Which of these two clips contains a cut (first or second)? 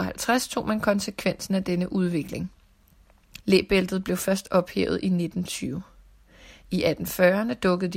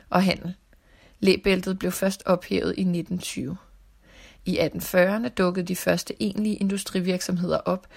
first